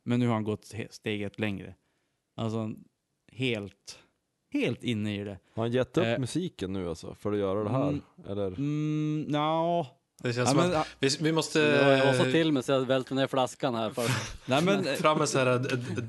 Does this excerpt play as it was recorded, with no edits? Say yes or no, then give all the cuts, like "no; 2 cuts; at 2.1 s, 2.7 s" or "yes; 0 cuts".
no; 1 cut; at 10.2 s